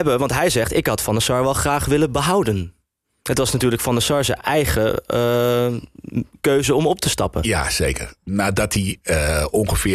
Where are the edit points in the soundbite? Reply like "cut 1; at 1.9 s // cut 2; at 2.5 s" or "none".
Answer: none